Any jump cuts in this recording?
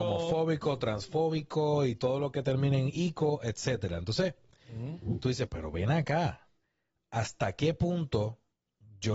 yes; 1 cut; at 5.5 s

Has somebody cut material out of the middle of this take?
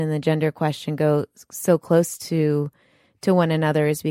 no; 0 cuts

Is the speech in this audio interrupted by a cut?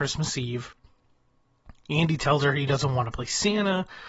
no; 0 cuts

